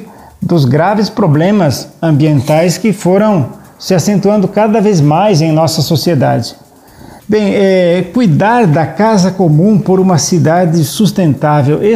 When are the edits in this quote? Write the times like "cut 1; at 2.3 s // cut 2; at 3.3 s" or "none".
cut 1; at 7.2 s